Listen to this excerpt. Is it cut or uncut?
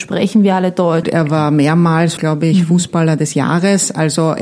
cut